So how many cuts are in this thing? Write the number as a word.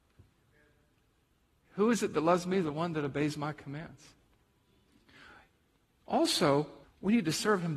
one